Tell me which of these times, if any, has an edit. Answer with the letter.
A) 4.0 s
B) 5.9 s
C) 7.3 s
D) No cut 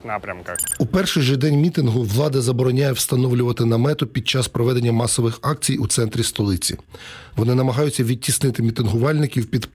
C